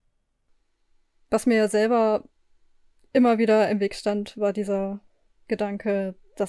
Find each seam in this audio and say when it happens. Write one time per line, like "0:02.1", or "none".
none